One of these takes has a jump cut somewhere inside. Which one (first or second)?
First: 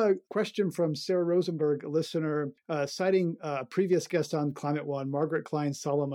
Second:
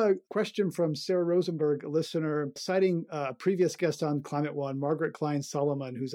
second